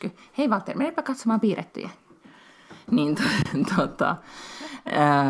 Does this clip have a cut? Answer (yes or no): no